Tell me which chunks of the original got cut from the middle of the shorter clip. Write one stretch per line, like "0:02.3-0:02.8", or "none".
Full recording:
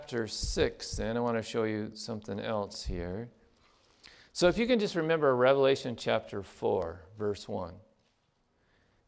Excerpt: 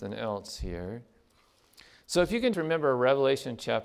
0:04.8-0:04.9